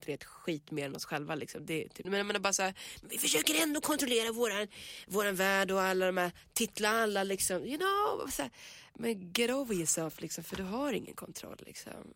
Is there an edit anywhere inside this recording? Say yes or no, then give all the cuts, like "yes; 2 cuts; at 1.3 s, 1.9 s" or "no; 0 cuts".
yes; 1 cut; at 2.0 s